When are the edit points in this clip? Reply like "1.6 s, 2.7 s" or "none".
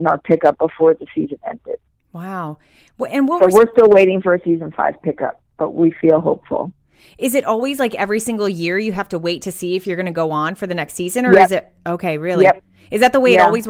none